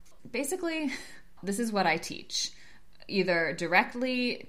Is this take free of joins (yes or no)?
no